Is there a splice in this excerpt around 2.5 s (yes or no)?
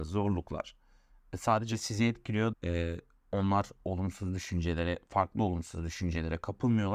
yes